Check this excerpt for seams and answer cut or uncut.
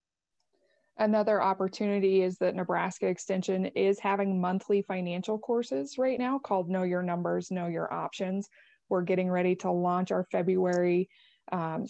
uncut